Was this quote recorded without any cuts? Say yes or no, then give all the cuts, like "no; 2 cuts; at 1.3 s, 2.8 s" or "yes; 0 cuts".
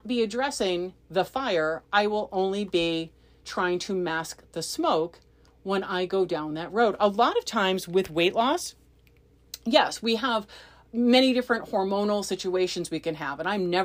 yes; 0 cuts